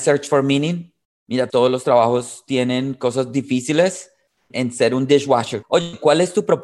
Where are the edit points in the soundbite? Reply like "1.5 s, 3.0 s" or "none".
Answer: 1.5 s, 4.5 s, 5.6 s